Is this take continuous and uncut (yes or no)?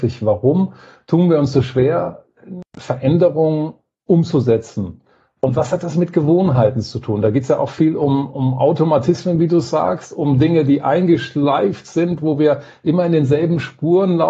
yes